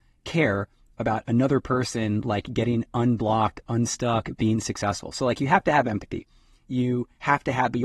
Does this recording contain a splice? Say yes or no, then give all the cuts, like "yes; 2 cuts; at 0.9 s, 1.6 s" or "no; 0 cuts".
no; 0 cuts